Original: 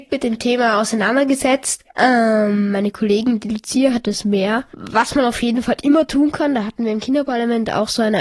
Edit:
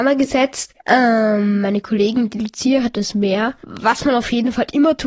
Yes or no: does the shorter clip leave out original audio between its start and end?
no